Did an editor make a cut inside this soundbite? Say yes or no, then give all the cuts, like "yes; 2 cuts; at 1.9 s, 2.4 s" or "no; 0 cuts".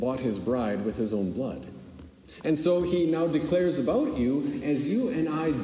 yes; 1 cut; at 2.4 s